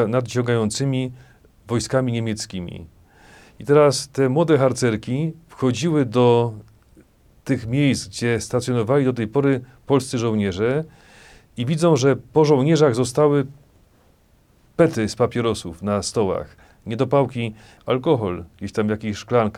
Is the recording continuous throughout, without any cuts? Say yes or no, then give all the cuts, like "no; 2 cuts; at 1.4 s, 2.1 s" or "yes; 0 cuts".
no; 1 cut; at 17.8 s